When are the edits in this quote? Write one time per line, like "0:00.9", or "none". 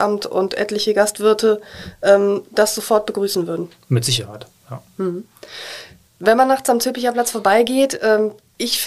none